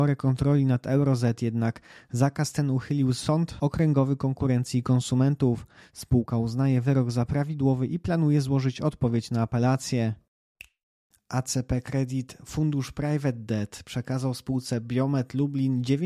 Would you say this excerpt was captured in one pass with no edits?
yes; 0 cuts

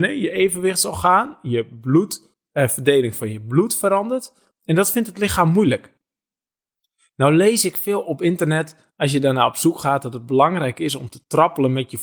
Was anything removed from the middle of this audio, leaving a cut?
no; 0 cuts

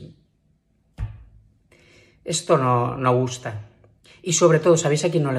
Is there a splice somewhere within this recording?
no; 0 cuts

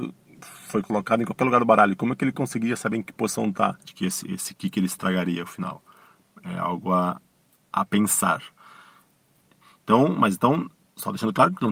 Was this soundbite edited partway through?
yes; 1 cut; at 3.9 s

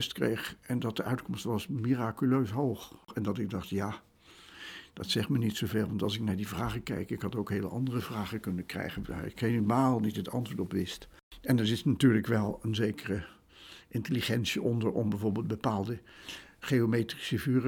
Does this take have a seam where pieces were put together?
no; 0 cuts

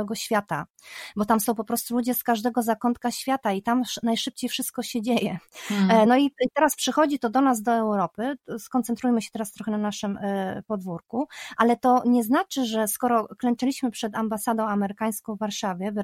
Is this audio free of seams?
yes; 0 cuts

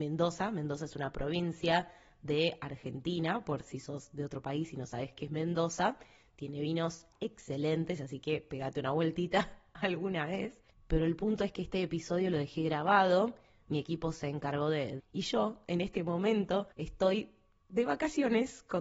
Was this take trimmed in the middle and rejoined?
yes; 2 cuts; at 15.0 s, 16.7 s

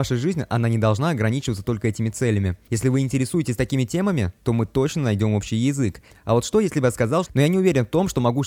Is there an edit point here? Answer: yes; 3 cuts; at 2.7 s, 6.1 s, 7.3 s

